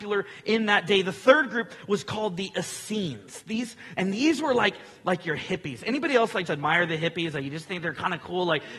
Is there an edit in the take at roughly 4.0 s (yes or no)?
yes